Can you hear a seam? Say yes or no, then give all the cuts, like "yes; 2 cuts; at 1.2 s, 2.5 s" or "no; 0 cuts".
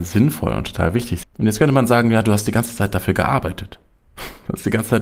yes; 1 cut; at 1.2 s